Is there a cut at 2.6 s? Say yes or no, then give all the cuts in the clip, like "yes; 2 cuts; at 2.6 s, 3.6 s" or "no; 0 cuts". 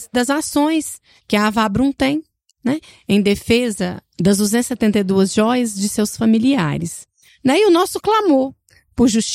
no; 1 cut; at 7.3 s